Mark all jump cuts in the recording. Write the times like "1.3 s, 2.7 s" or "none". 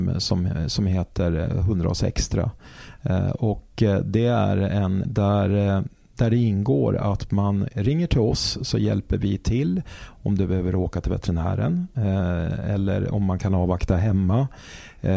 5.0 s